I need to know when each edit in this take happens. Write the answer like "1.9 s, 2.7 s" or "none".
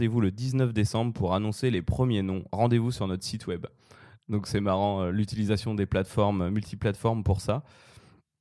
none